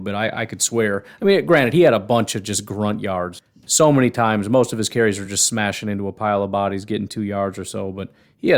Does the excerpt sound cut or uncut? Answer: uncut